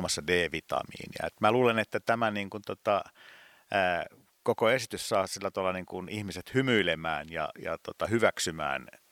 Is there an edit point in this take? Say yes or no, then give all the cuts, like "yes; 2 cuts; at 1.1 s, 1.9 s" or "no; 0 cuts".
no; 0 cuts